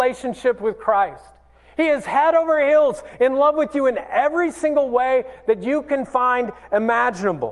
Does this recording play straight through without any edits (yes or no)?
yes